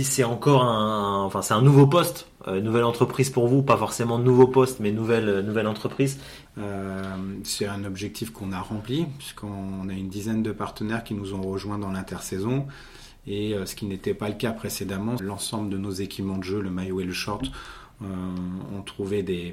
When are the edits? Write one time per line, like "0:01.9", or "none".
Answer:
0:06.5
0:15.2